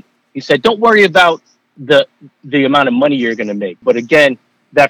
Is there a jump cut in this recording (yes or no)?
yes